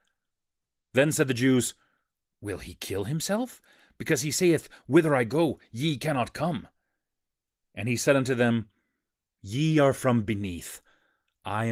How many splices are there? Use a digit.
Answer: 0